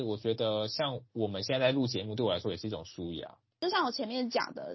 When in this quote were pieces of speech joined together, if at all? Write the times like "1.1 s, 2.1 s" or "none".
3.5 s